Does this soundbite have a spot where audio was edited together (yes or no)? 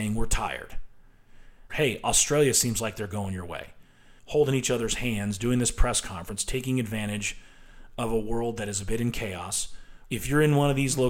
yes